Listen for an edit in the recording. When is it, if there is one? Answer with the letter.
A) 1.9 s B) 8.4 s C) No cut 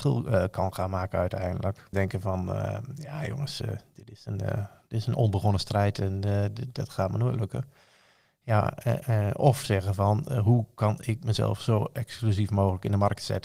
A